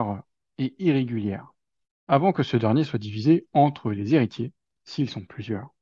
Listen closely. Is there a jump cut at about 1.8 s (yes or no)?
yes